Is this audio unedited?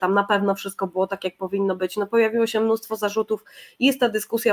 yes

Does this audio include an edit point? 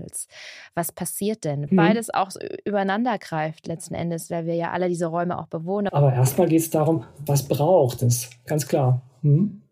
yes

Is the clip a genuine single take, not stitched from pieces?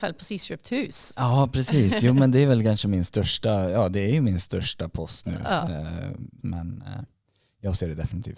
no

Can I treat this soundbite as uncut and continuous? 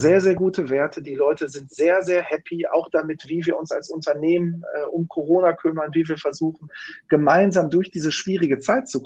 yes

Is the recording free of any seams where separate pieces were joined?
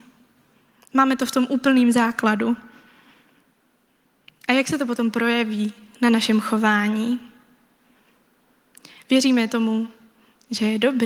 yes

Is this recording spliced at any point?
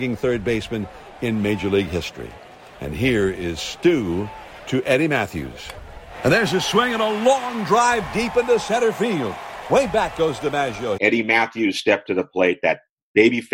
yes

